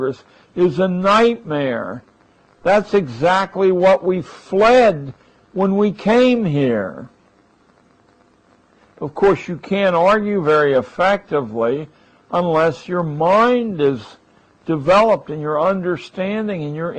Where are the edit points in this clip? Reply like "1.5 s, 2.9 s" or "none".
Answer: none